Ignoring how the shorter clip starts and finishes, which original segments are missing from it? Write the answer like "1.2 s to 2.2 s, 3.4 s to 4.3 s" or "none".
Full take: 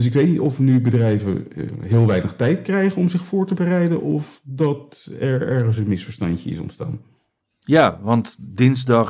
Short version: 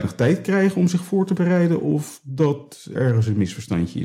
5.2 s to 5.5 s